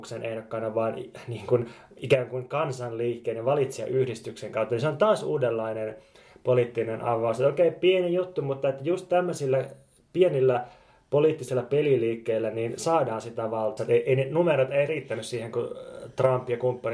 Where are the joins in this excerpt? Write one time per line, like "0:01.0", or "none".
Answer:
0:13.8